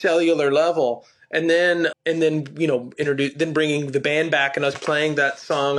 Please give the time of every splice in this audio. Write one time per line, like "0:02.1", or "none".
0:01.9